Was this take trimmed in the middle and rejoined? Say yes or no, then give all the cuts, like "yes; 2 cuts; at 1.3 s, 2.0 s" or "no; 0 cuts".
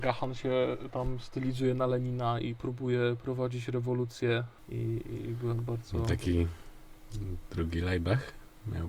no; 0 cuts